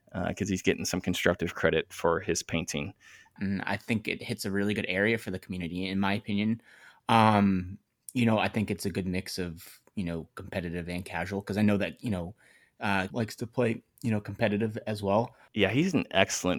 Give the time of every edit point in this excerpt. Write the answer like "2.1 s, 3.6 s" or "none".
3.4 s, 13.1 s, 15.5 s